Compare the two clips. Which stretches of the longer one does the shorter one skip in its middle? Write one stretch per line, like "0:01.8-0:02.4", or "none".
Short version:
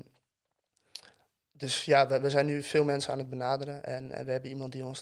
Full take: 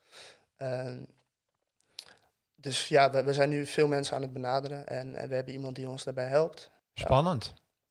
none